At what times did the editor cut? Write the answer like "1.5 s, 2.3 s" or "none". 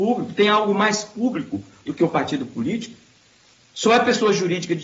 none